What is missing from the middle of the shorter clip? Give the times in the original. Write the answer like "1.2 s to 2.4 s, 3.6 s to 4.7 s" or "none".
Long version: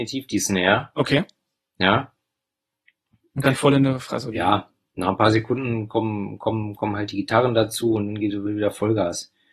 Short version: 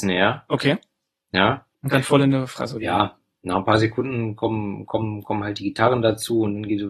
2.2 s to 3.3 s